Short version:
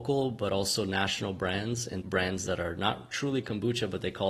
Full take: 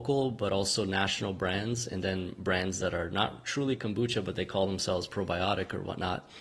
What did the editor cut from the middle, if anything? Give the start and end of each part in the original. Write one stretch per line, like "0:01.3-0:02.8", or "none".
0:02.0-0:02.4

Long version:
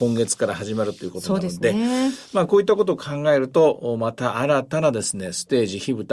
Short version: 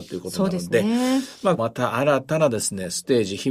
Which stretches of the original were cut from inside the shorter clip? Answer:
0:02.5-0:04.0

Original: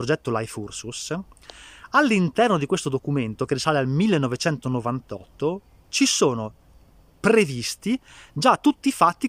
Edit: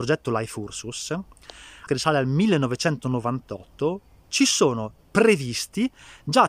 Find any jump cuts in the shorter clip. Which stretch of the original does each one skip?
0:01.9-0:03.5
0:06.6-0:07.1

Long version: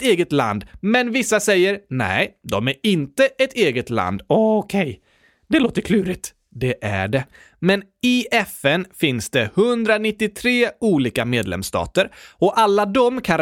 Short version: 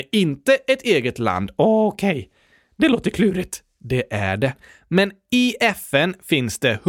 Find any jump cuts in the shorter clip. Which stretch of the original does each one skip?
none

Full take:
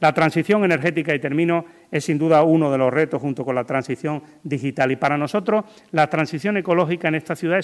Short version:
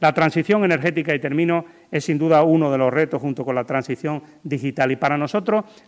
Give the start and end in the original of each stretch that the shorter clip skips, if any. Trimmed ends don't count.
none

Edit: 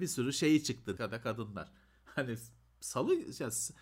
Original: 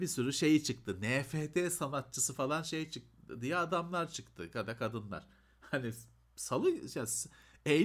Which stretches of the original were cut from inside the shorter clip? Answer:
0:01.0-0:04.5

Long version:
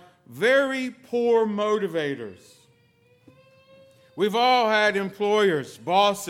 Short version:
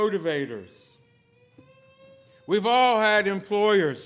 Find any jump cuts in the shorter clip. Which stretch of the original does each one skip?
none

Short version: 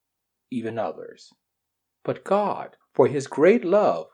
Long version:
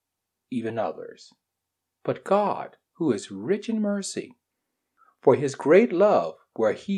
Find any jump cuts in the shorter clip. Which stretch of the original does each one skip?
0:02.8-0:05.1

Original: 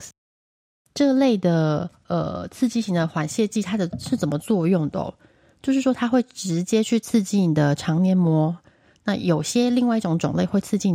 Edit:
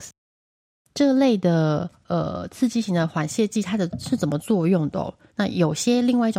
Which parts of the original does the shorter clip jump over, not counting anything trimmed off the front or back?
0:05.3-0:09.0

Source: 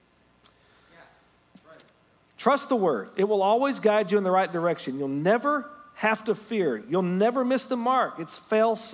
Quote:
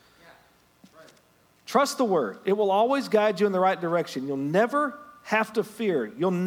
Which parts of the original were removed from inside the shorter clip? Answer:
none

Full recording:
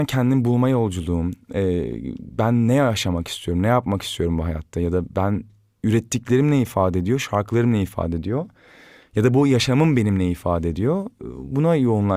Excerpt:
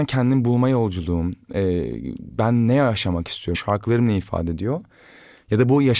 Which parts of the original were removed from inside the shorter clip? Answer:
0:03.5-0:07.2

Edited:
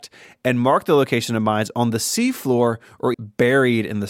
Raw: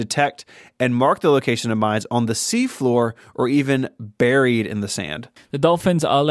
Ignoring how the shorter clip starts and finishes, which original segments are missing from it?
0:03.5-0:03.9

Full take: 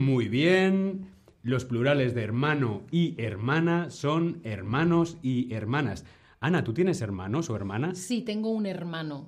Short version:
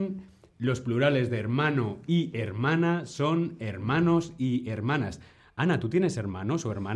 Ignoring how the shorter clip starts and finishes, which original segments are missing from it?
none

